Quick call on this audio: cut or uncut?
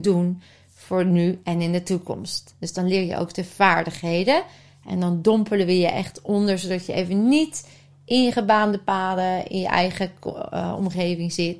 uncut